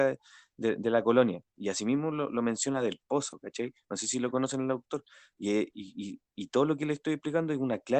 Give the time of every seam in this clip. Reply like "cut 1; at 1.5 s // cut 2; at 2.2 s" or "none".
none